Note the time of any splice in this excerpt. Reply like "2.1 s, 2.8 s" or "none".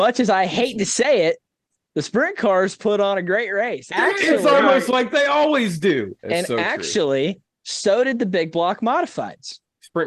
3.9 s, 6.2 s